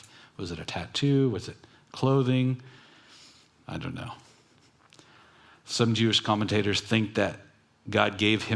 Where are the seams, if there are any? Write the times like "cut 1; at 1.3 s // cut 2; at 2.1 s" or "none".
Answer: none